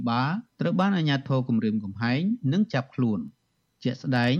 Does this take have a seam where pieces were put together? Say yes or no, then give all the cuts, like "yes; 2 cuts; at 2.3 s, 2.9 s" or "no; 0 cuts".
no; 0 cuts